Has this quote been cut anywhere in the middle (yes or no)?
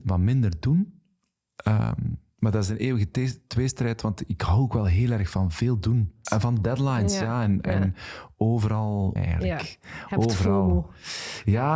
yes